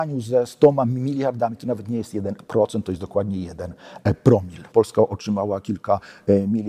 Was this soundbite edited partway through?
yes; 1 cut; at 4.7 s

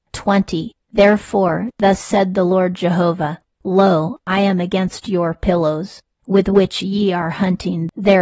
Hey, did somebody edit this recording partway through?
no; 0 cuts

